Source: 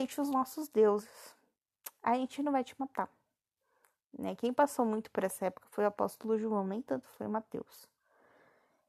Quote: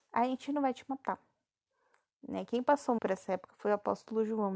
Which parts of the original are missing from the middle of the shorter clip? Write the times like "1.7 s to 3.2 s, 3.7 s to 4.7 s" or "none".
4.9 s to 5.1 s

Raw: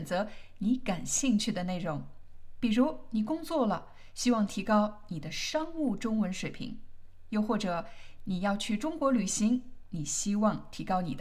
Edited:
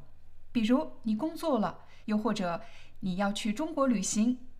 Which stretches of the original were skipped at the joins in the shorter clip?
4.1 s to 7.3 s

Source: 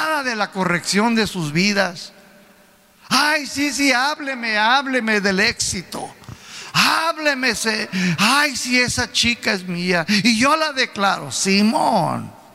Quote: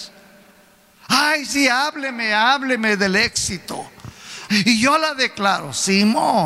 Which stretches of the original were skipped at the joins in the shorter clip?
3.5 s to 3.7 s, 6.7 s to 10.1 s

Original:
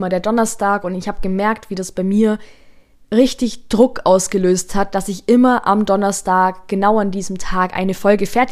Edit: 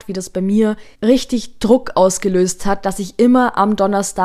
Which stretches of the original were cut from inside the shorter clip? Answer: 2.6 s to 3.0 s

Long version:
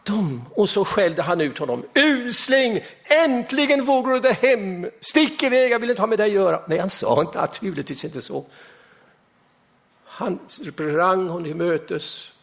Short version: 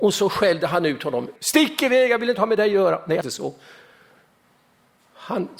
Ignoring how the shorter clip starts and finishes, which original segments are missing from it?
1.9 s to 5.0 s, 6.8 s to 8.1 s

